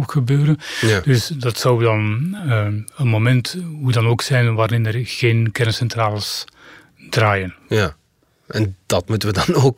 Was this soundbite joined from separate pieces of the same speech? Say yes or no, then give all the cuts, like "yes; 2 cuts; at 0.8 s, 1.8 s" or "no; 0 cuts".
no; 0 cuts